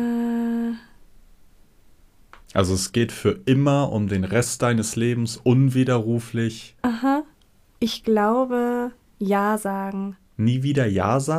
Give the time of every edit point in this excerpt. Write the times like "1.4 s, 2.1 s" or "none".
6.8 s